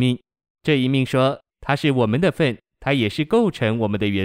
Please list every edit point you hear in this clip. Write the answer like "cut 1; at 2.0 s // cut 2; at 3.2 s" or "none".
cut 1; at 1.5 s